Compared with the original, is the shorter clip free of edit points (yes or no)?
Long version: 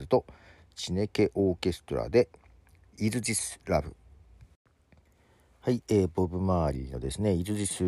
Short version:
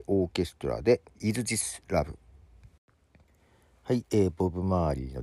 no